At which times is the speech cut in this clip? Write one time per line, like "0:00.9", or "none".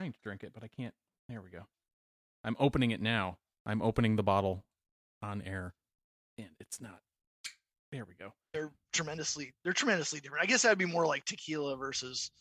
0:06.3
0:08.5